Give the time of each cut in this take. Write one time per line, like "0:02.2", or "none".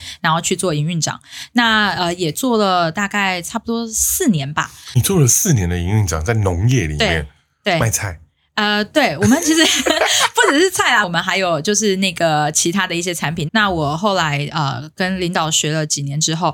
0:11.0
0:13.5